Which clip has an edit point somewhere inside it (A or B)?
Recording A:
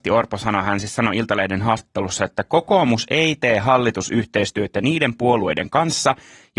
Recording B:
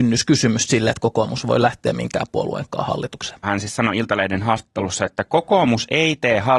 B